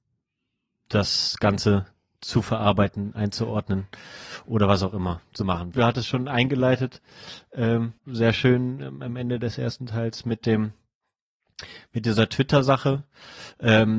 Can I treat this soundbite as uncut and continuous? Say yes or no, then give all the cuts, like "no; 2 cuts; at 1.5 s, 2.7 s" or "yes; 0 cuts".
no; 2 cuts; at 5.7 s, 8.0 s